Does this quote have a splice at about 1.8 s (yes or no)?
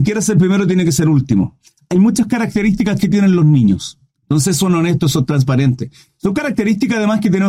no